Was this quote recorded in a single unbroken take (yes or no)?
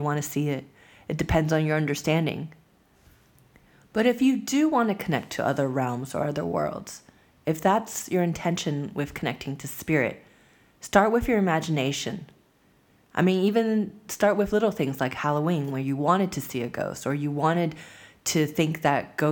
no